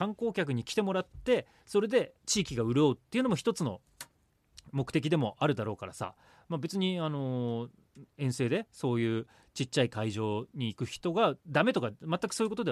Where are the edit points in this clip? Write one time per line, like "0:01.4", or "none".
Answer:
0:02.2